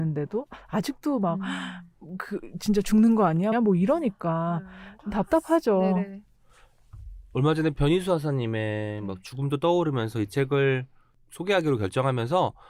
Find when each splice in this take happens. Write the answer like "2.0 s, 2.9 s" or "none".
3.5 s